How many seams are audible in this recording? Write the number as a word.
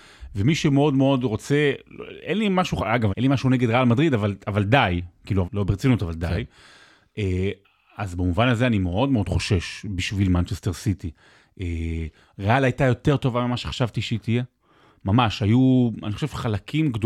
two